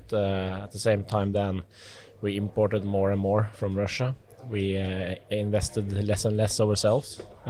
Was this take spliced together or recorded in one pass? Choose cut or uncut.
uncut